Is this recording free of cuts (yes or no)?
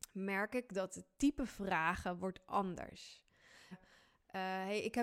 no